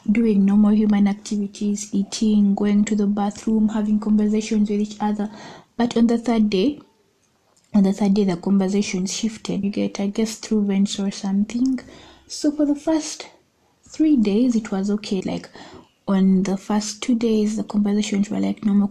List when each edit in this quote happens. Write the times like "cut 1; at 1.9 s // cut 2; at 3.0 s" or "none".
cut 1; at 9.6 s // cut 2; at 15.2 s

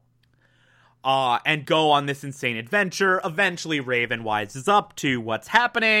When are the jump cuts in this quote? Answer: cut 1; at 1.6 s

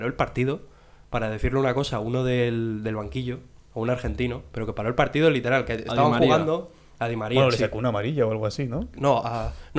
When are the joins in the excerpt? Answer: none

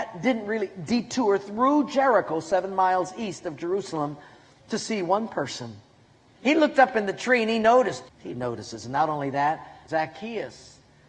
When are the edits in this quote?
cut 1; at 6.3 s // cut 2; at 8.1 s // cut 3; at 9.9 s

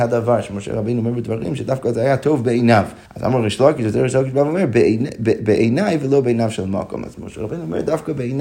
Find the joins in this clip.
cut 1; at 3.1 s

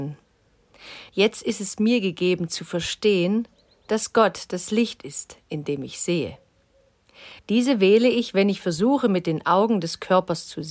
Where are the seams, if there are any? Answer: cut 1; at 1.1 s // cut 2; at 7.4 s

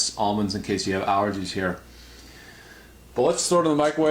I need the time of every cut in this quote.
cut 1; at 3.1 s

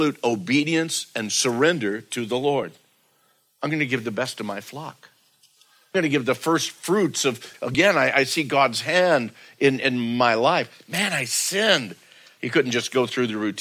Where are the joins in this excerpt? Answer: cut 1; at 7.5 s // cut 2; at 12.4 s

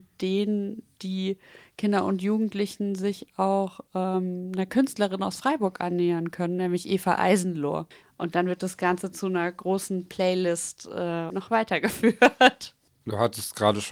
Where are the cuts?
cut 1; at 8.0 s // cut 2; at 11.3 s

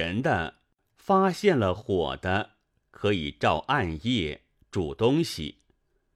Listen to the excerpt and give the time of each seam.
none

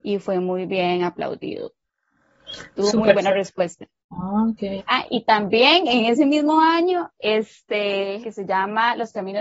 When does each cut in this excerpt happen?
cut 1; at 4.8 s // cut 2; at 8.2 s

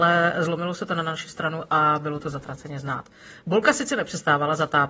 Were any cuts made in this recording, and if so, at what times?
none

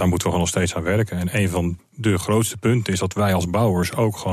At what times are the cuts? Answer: cut 1; at 1.8 s

